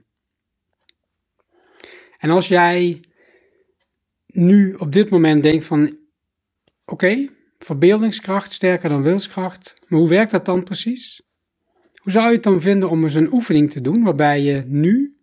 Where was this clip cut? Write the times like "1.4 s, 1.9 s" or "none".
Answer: none